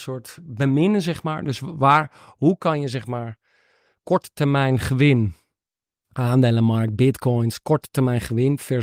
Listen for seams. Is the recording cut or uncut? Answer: uncut